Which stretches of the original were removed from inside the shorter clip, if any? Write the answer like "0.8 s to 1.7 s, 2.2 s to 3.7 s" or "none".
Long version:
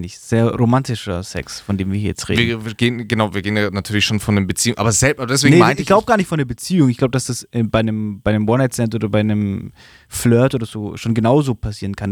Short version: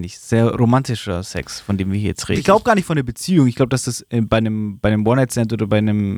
2.3 s to 5.8 s